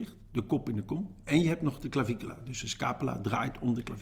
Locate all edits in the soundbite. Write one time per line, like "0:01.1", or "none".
none